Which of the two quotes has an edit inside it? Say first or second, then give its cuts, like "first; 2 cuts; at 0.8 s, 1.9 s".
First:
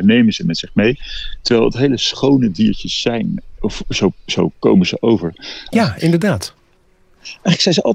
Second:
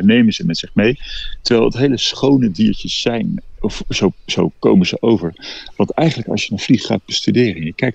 first; 1 cut; at 5.7 s